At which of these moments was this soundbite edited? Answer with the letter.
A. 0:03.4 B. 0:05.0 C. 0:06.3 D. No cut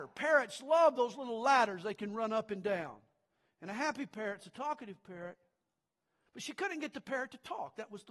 C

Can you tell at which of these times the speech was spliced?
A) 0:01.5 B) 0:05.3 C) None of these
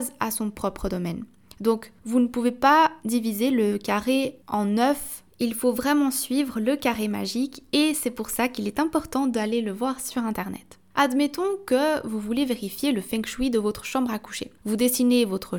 B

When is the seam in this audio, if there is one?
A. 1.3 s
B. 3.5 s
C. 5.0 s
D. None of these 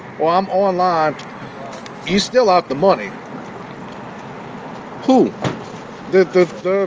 A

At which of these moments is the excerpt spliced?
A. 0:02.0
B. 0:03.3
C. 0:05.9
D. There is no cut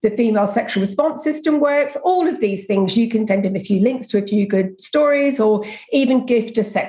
B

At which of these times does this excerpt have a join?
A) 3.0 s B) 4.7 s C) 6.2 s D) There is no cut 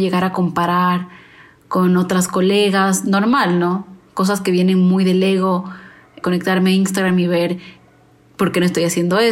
C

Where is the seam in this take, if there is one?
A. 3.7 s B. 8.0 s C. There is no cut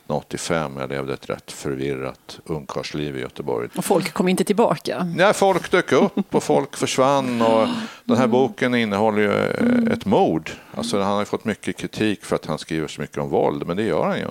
A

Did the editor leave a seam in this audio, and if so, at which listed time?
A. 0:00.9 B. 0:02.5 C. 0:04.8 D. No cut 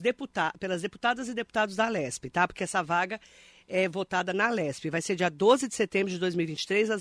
D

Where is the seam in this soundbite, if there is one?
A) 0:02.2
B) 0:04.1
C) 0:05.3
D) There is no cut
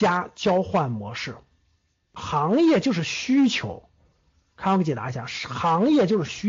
A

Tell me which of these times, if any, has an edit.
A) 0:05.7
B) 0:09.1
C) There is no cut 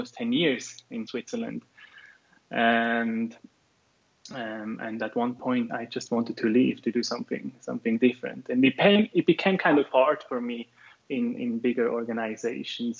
A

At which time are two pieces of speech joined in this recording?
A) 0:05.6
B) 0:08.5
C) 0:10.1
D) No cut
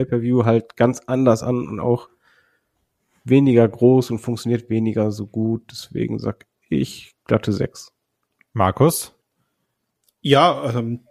D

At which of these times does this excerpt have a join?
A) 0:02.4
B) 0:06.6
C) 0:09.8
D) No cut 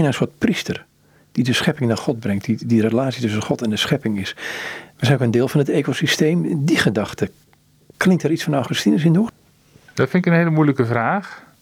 D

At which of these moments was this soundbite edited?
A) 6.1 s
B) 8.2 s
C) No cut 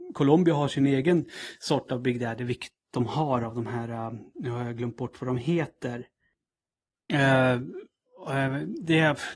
C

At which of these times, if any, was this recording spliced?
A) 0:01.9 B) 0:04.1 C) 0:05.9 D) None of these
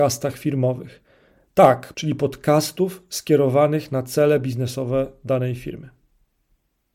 A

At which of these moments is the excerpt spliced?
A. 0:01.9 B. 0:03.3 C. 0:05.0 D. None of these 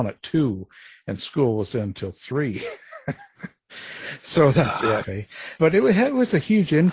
C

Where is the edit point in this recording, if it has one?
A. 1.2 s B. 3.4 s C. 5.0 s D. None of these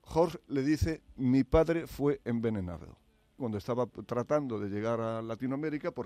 B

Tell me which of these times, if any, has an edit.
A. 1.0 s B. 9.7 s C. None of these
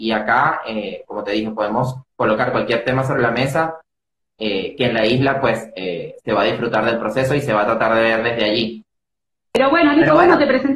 C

